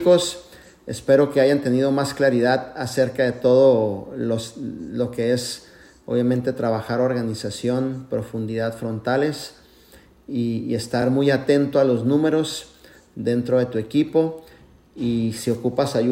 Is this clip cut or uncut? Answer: uncut